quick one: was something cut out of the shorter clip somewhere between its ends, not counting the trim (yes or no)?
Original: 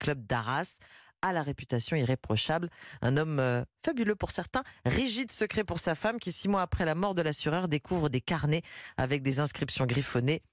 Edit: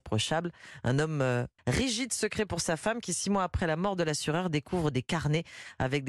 yes